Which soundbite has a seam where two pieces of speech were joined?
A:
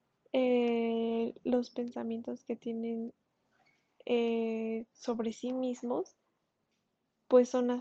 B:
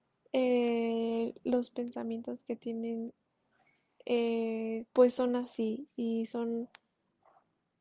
B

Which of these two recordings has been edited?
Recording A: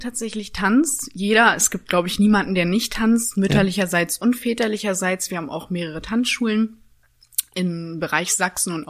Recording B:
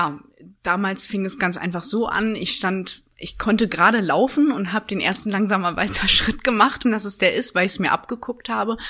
B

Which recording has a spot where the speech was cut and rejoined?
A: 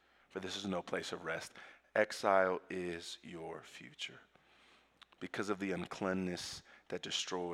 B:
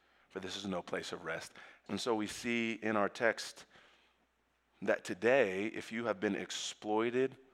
B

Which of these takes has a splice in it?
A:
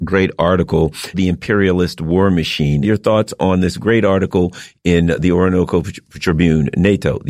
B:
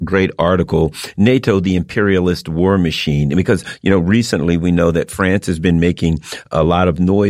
A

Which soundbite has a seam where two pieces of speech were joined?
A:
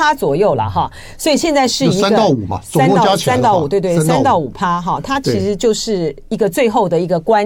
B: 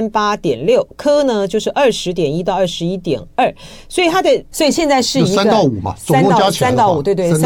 B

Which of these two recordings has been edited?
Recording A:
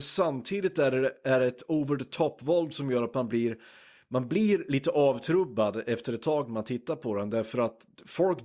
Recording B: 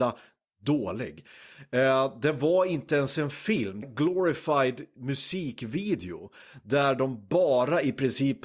B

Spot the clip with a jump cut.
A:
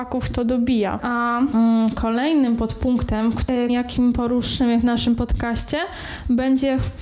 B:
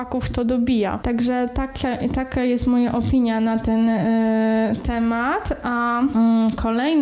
A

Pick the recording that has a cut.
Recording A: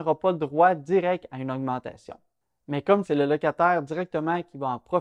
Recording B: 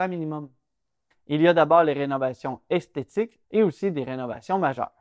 B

